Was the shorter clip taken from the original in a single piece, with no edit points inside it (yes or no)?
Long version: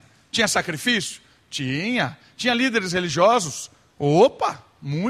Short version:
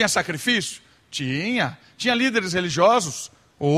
yes